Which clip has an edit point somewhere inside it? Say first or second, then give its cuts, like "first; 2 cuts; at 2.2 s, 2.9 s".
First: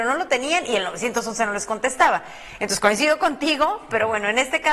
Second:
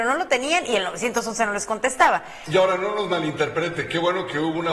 second; 1 cut; at 2.5 s